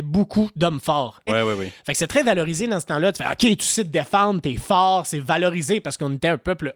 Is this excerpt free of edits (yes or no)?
no